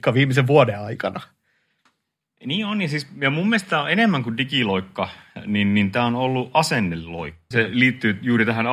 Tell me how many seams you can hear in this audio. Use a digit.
1